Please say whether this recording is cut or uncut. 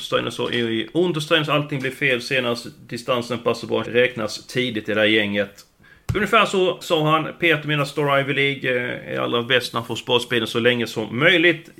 cut